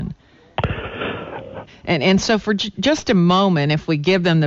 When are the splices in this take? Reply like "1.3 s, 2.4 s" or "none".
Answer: 1.7 s